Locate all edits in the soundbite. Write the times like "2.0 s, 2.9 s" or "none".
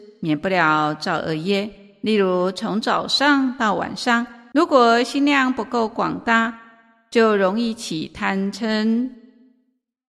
4.5 s